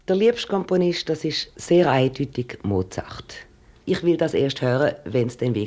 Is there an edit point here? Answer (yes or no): yes